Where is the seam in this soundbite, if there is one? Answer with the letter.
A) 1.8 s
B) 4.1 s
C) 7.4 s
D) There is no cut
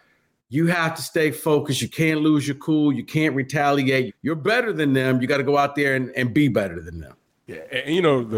B